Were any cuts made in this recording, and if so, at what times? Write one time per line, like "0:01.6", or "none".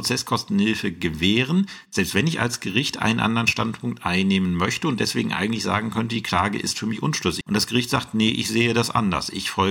0:07.4

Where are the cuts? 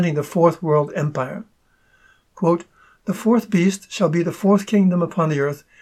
0:02.3

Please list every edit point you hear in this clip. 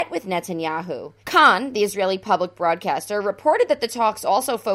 0:01.2

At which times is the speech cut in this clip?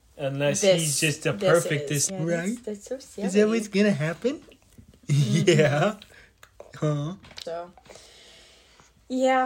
0:02.1
0:07.4

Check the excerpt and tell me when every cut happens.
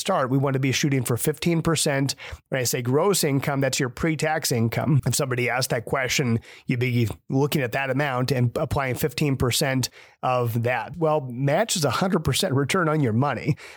0:05.0
0:10.9

